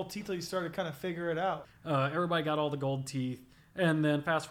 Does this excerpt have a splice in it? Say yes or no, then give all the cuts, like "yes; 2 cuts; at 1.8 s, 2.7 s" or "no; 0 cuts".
yes; 1 cut; at 1.6 s